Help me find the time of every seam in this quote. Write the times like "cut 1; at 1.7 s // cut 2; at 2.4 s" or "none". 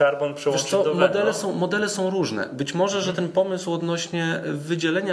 none